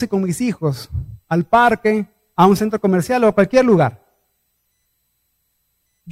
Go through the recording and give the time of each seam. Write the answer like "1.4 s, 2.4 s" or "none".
none